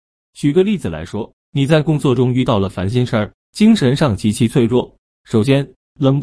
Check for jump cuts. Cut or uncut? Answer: cut